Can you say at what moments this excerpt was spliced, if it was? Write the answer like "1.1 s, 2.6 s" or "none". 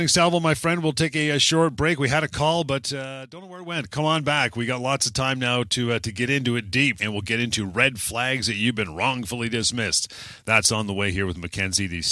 none